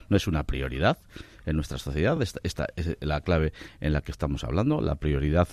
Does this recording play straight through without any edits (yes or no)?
yes